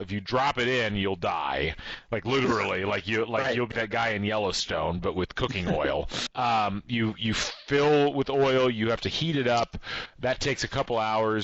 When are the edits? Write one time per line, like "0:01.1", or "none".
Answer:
0:03.7
0:06.3